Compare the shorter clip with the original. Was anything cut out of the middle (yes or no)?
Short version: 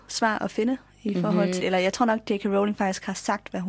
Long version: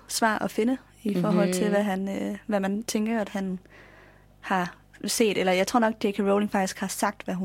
yes